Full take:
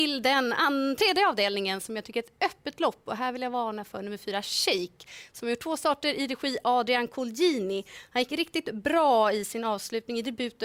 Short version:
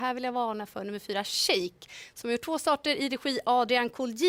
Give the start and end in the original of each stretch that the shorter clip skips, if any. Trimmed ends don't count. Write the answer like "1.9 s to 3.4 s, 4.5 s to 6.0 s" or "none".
none